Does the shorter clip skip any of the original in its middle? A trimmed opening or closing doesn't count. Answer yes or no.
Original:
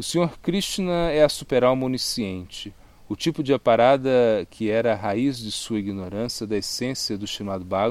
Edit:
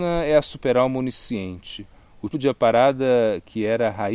yes